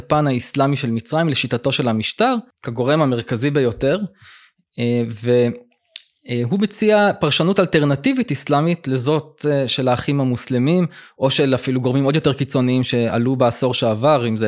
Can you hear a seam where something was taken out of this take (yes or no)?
yes